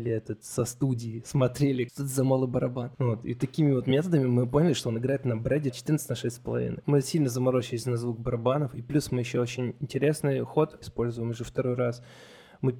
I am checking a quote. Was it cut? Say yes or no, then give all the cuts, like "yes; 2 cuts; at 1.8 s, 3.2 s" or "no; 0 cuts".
no; 0 cuts